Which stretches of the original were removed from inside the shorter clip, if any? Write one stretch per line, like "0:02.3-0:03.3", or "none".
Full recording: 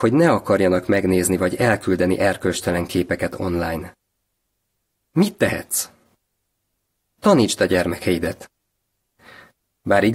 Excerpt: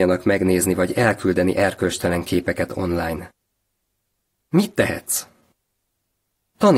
none